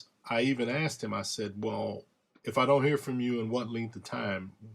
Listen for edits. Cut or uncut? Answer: uncut